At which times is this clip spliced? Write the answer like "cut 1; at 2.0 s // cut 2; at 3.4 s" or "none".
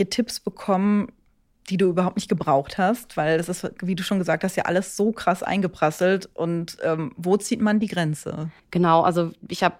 cut 1; at 8.6 s